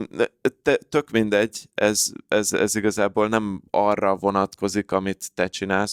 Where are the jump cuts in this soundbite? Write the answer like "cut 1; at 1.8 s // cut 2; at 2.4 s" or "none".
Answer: cut 1; at 3.7 s